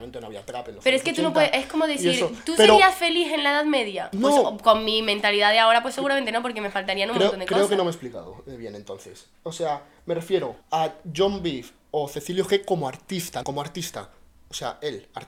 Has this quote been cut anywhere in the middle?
yes; 2 cuts; at 10.6 s, 13.4 s

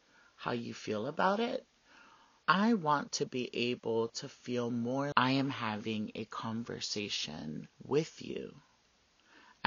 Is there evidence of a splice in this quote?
yes; 3 cuts; at 2.4 s, 5.1 s, 7.7 s

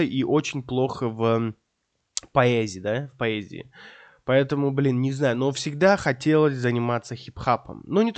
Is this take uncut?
yes; 0 cuts

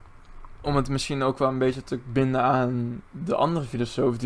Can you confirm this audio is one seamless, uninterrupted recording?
no; 1 cut; at 3.1 s

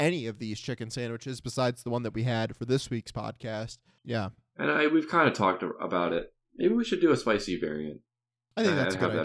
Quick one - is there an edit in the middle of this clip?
yes; 1 cut; at 4.0 s

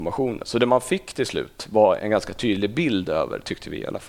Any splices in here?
yes; 1 cut; at 2.0 s

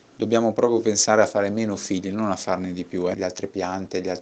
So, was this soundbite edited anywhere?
yes; 1 cut; at 3.1 s

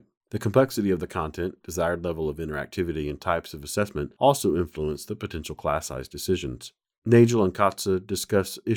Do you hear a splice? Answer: no; 0 cuts

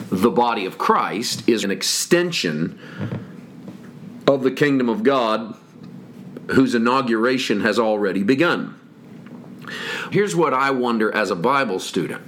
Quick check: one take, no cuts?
no; 2 cuts; at 1.6 s, 10.1 s

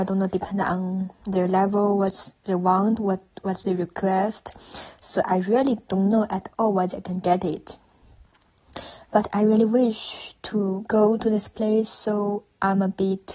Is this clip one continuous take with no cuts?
yes; 0 cuts

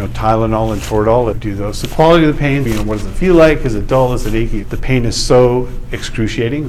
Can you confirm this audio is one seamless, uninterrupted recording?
no; 3 cuts; at 1.3 s, 2.7 s, 4.6 s

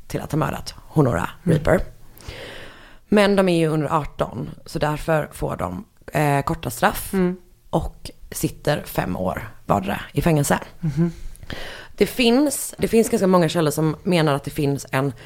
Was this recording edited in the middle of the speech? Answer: yes; 1 cut; at 12.8 s

